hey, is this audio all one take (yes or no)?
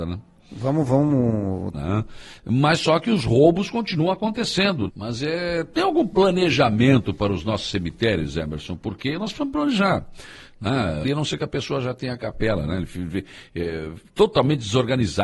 no